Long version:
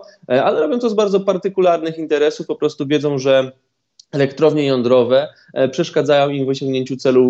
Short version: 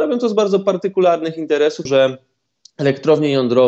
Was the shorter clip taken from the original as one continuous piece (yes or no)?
no